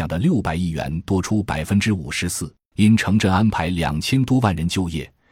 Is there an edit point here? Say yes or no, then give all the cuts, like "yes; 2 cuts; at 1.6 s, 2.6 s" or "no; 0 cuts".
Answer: yes; 1 cut; at 2.7 s